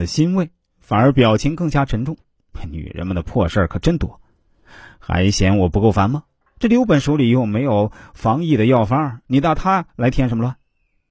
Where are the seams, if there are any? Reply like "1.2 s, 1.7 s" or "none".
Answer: none